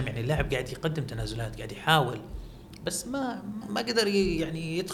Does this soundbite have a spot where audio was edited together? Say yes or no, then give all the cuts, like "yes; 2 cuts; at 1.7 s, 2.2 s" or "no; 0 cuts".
yes; 1 cut; at 3.6 s